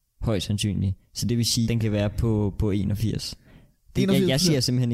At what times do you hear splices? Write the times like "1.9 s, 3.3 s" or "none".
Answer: 1.6 s